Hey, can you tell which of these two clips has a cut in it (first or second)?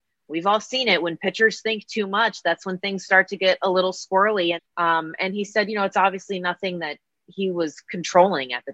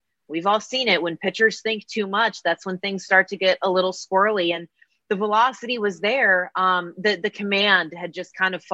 first